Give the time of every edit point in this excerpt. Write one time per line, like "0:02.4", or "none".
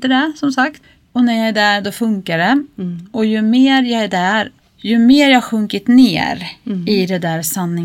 0:04.6